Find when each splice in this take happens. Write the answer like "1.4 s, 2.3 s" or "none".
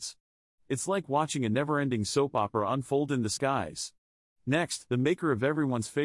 4.9 s